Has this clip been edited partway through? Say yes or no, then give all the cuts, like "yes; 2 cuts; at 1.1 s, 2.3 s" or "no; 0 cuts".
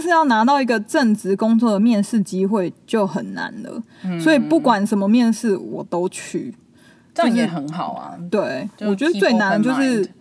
no; 0 cuts